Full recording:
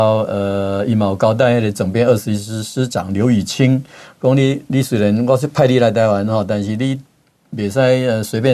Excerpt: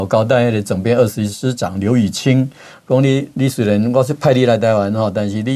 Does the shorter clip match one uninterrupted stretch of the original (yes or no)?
no